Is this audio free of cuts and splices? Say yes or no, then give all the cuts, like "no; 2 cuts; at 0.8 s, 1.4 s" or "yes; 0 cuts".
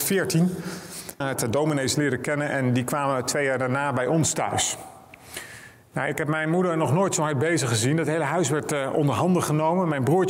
no; 1 cut; at 1.2 s